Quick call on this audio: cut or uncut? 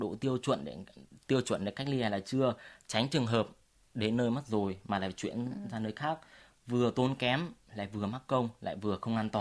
uncut